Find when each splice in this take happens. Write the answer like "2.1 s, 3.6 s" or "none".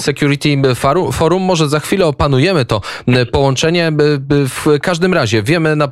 none